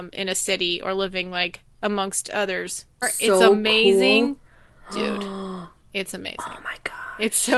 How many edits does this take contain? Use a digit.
1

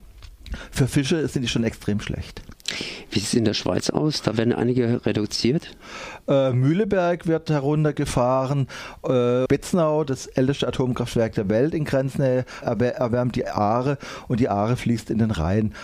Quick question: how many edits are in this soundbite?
2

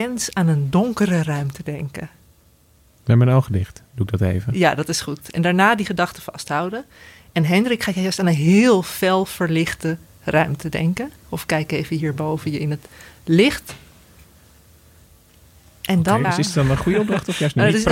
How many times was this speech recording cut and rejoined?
1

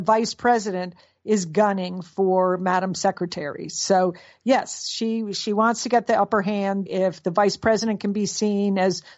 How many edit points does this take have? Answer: 1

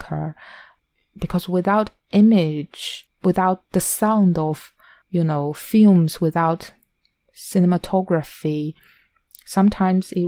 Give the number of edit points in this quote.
0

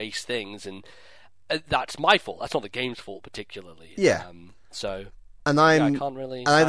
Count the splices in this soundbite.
0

